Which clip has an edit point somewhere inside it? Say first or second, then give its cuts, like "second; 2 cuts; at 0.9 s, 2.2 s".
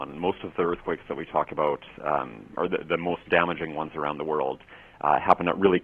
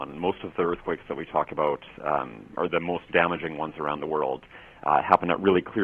second; 1 cut; at 2.7 s